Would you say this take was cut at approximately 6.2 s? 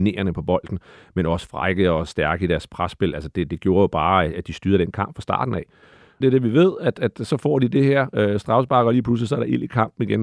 yes; 1 cut; at 6.2 s

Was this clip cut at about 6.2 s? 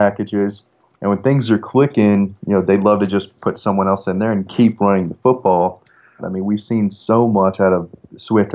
yes; 2 cuts; at 0.9 s, 6.2 s

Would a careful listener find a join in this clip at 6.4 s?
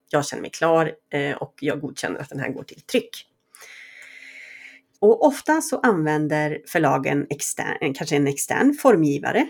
no; 1 cut; at 4.9 s

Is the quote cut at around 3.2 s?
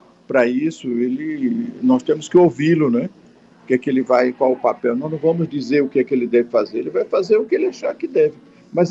no; 0 cuts

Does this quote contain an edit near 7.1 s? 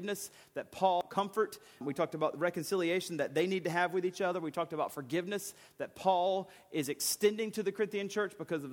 no; 1 cut; at 1.8 s

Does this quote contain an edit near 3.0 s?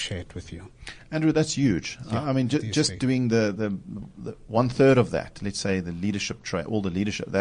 no; 0 cuts

